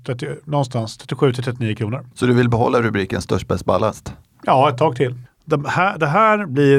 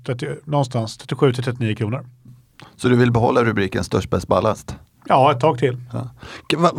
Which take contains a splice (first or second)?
first